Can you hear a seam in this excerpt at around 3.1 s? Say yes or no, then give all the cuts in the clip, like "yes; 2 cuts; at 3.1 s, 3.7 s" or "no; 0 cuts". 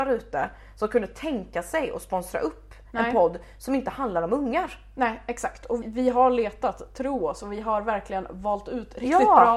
no; 1 cut; at 5.8 s